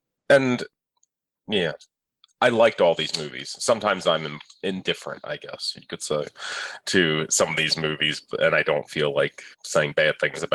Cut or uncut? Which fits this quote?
cut